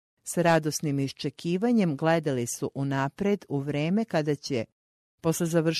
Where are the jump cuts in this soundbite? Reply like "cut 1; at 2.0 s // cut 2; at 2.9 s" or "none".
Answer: none